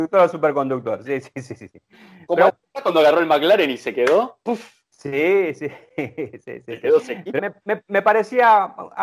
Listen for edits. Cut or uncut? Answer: cut